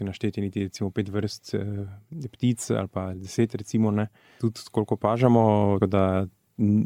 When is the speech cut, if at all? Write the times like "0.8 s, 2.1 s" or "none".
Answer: 5.8 s

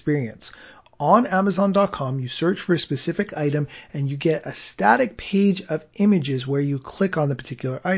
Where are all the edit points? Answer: none

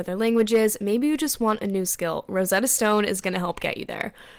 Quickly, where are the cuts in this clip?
none

